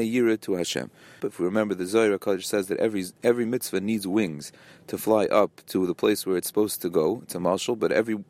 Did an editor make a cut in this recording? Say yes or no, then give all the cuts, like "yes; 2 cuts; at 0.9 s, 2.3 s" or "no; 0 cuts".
yes; 1 cut; at 1.2 s